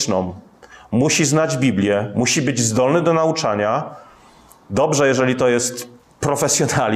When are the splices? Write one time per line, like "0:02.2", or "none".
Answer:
none